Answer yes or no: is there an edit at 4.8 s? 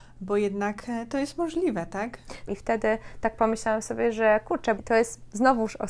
yes